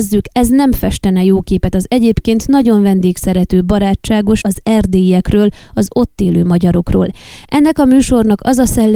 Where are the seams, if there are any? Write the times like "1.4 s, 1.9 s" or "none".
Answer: 4.4 s, 7.4 s